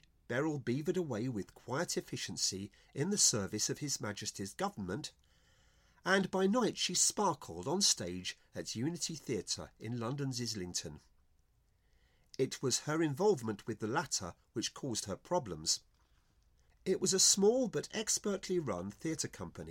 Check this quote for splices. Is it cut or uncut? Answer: cut